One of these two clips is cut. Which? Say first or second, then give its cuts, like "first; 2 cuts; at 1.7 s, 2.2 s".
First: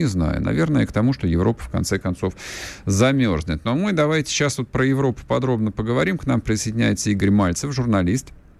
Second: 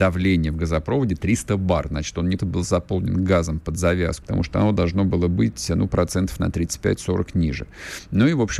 second; 2 cuts; at 2.4 s, 4.2 s